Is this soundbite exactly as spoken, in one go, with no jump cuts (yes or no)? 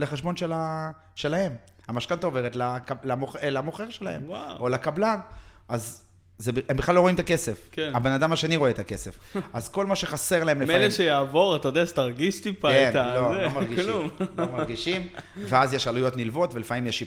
yes